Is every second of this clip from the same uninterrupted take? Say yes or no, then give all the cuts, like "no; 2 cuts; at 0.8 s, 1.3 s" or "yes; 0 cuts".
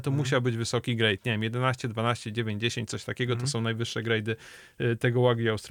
yes; 0 cuts